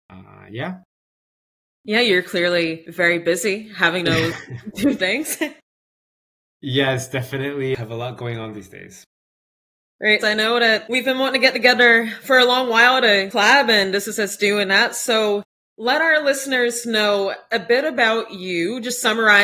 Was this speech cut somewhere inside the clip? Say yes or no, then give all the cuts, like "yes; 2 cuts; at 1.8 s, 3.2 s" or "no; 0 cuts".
yes; 1 cut; at 10.2 s